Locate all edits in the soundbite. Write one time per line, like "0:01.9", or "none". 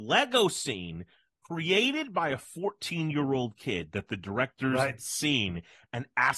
none